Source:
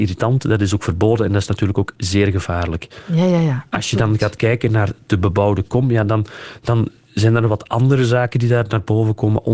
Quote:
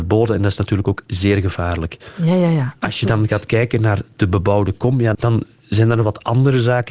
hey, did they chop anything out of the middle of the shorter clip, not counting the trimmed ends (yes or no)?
yes